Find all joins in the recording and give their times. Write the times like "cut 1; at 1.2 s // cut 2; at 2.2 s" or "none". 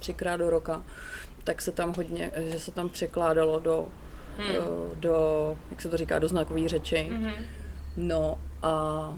none